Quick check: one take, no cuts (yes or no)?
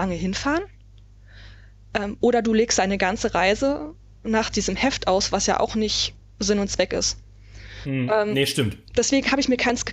yes